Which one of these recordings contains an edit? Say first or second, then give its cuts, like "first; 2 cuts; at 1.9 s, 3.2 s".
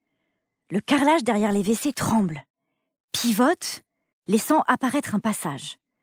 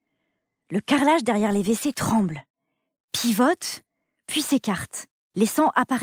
first; 1 cut; at 4.1 s